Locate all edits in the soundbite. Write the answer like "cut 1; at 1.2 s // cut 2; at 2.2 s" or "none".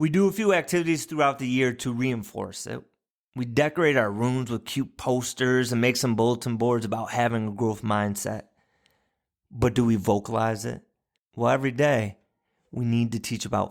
cut 1; at 11.2 s